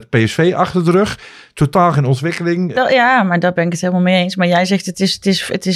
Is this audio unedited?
no; 1 cut; at 2.7 s

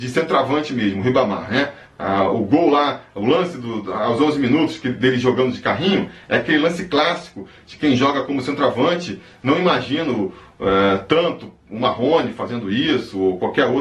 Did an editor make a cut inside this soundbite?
no; 0 cuts

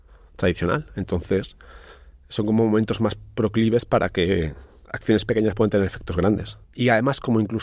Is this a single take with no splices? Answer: no; 1 cut; at 6.6 s

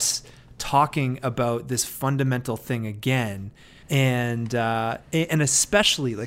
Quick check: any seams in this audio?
yes; 1 cut; at 3.8 s

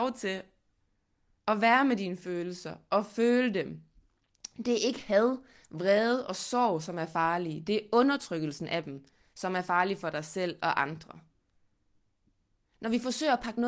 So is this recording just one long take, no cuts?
yes; 0 cuts

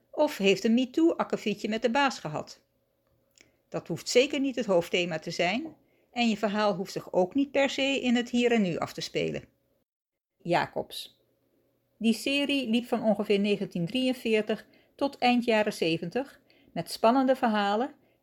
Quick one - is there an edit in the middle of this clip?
yes; 1 cut; at 10.4 s

